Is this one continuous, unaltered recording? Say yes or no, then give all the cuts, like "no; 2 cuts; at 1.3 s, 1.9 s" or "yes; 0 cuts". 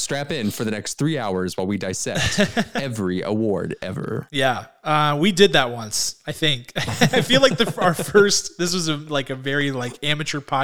yes; 0 cuts